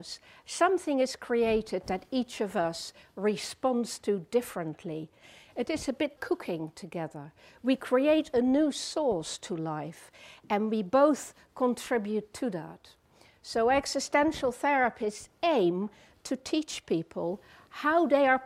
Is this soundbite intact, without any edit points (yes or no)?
no